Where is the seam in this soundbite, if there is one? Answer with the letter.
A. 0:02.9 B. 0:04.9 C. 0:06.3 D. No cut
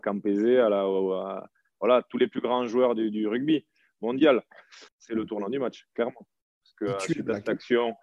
B